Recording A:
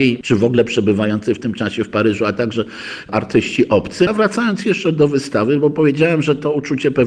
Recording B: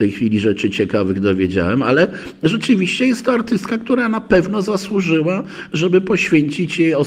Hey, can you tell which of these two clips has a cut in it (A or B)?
A